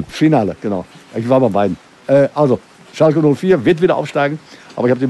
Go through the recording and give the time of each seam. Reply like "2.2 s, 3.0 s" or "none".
none